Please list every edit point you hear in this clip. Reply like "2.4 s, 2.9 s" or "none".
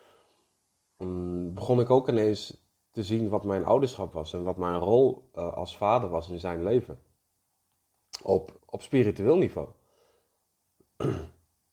8.6 s